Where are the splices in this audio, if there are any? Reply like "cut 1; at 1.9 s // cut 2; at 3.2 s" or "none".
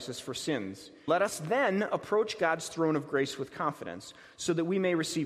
cut 1; at 1.1 s